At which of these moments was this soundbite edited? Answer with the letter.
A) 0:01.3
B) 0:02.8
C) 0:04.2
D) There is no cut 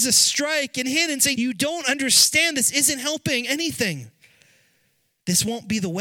A